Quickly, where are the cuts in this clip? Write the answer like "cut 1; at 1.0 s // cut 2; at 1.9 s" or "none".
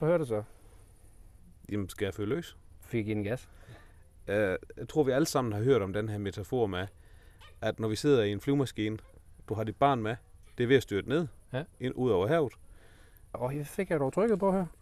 cut 1; at 10.4 s // cut 2; at 13.3 s